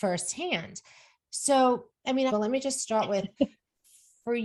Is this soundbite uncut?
no; 1 cut; at 2.3 s

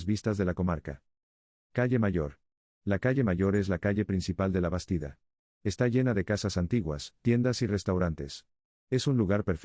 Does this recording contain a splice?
no; 0 cuts

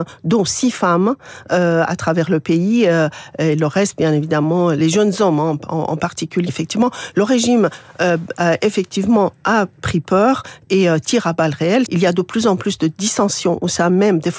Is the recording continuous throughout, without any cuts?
no; 2 cuts; at 6.5 s, 11.8 s

